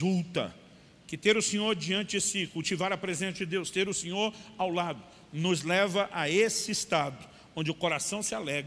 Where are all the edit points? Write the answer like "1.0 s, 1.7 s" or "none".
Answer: 1.0 s